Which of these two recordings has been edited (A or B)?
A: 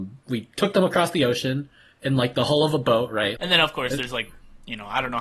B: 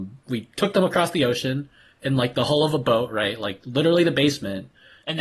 A